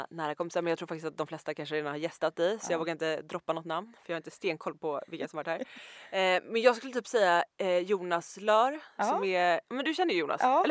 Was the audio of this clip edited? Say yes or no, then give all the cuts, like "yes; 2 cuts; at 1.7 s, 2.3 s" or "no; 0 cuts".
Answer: no; 0 cuts